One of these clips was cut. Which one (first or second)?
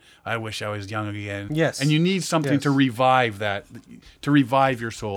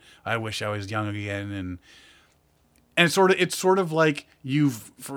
first